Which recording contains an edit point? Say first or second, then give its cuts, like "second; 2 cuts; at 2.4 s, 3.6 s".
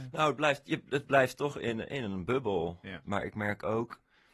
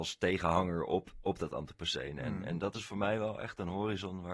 first; 1 cut; at 3.0 s